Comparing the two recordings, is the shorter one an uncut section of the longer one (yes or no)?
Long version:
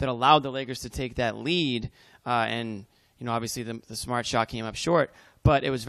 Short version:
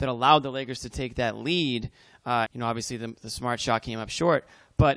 no